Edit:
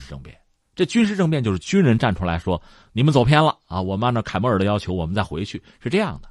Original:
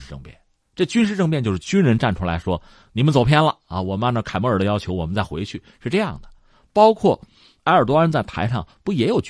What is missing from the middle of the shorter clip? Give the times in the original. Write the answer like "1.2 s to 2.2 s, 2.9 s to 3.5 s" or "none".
none